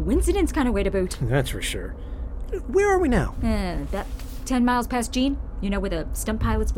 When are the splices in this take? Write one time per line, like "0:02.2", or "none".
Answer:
none